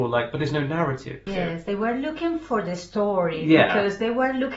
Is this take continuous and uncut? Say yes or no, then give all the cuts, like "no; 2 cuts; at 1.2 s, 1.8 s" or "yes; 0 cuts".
no; 1 cut; at 1.3 s